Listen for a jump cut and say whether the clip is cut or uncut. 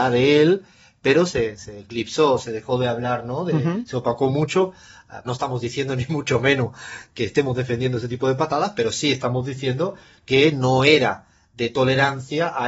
cut